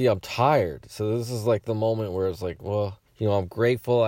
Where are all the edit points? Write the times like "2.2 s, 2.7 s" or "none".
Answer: 3.1 s